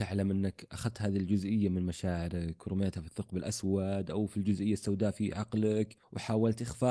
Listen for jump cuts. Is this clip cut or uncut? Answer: uncut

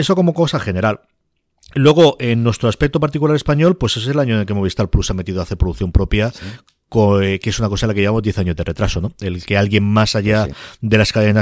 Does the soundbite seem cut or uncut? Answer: uncut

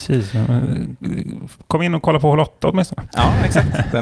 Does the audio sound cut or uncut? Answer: uncut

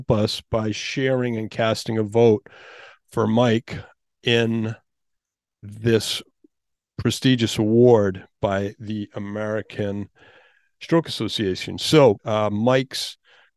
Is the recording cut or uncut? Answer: cut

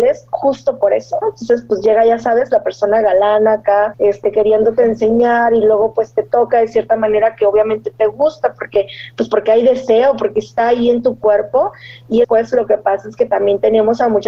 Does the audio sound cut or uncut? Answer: cut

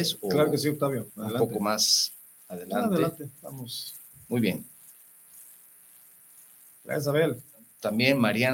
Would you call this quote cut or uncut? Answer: cut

